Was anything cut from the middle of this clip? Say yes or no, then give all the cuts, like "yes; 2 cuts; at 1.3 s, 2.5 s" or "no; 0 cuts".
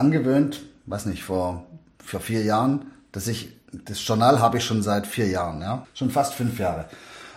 yes; 1 cut; at 5.8 s